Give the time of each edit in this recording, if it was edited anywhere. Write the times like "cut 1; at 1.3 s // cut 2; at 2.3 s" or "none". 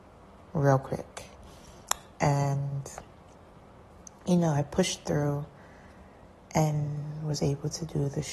none